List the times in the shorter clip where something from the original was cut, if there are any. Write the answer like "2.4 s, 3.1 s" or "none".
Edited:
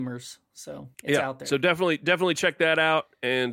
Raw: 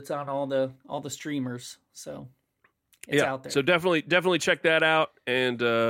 0.9 s